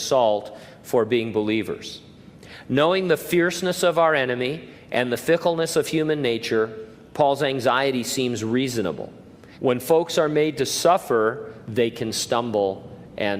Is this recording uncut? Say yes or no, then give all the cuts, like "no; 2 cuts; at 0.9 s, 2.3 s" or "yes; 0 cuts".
no; 2 cuts; at 9.5 s, 11.7 s